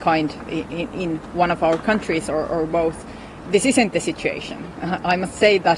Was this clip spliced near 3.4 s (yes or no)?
no